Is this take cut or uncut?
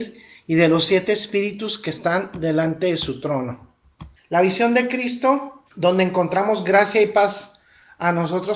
cut